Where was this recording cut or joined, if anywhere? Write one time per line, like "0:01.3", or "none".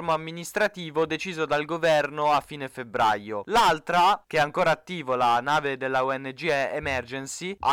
none